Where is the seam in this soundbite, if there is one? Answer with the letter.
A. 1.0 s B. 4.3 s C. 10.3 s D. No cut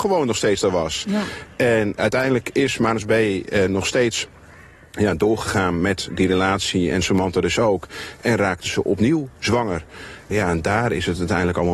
C